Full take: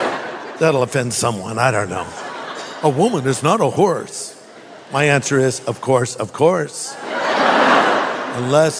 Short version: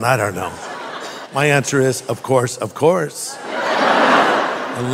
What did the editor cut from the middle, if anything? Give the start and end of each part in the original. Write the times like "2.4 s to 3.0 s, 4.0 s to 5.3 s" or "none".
2.8 s to 4.8 s

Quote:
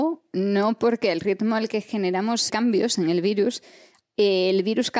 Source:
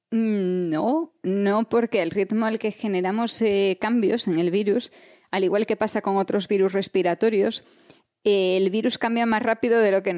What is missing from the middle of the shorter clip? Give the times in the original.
3.4 s to 3.8 s, 5.3 s to 8.1 s

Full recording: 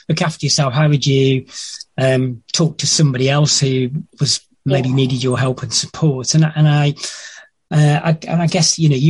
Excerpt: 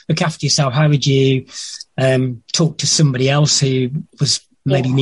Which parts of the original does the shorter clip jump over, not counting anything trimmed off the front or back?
none

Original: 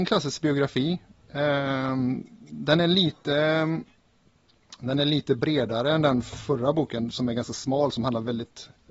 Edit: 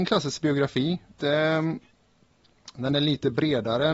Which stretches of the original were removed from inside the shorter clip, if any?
1.2 s to 3.2 s

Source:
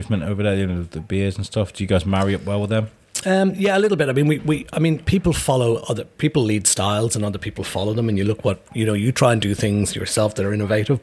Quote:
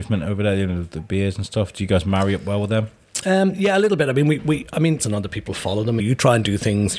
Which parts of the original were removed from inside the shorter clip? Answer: 5.0 s to 7.1 s, 8.1 s to 9.0 s

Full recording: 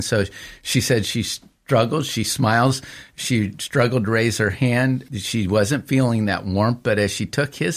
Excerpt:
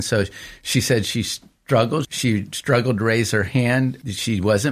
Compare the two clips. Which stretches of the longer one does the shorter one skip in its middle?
2.0 s to 3.1 s

